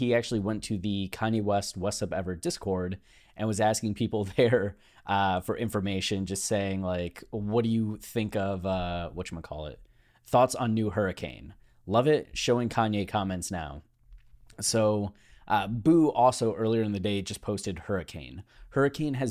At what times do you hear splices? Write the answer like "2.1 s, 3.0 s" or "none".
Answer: none